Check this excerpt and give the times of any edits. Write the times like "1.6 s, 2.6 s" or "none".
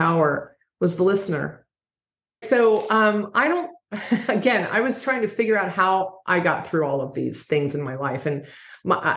2.4 s